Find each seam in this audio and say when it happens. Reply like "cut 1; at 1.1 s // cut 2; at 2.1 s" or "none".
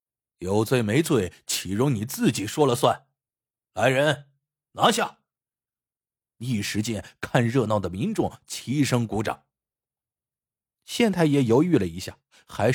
cut 1; at 6.2 s // cut 2; at 10.6 s